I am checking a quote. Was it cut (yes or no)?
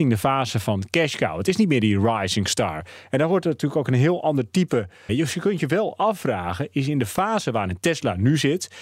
yes